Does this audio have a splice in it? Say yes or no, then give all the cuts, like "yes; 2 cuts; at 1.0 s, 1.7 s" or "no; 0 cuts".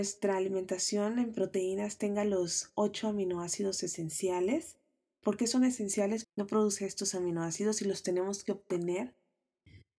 yes; 1 cut; at 6.2 s